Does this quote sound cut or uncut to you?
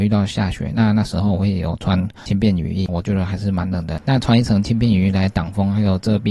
cut